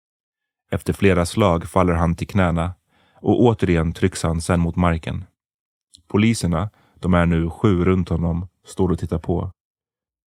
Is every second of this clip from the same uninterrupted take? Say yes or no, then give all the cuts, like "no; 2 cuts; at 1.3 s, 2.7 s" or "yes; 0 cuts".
no; 1 cut; at 5.9 s